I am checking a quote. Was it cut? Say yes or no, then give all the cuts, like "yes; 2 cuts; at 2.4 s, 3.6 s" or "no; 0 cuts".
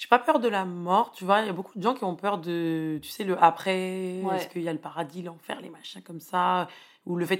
no; 0 cuts